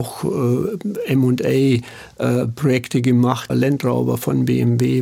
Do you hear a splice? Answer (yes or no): yes